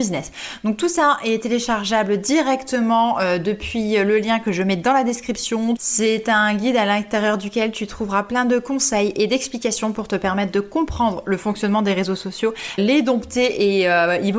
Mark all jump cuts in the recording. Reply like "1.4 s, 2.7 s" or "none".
5.8 s, 12.8 s